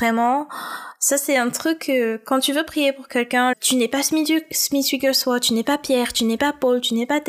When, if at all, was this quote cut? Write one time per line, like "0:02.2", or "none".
0:03.5